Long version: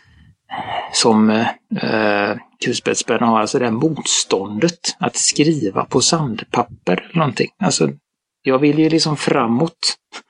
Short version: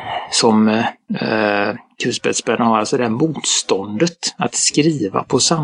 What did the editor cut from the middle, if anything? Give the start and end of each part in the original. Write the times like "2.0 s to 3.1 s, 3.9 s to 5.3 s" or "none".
none